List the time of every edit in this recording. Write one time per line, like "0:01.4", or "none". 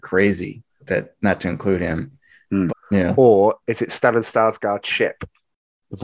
0:02.7